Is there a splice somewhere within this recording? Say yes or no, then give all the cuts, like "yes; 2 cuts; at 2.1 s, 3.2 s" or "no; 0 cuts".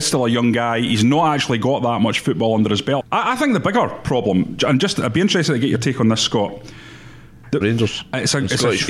yes; 2 cuts; at 3.0 s, 7.6 s